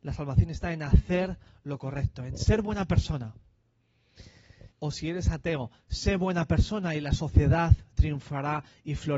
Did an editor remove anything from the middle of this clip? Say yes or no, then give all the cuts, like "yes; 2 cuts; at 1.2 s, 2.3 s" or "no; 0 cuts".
yes; 1 cut; at 4.7 s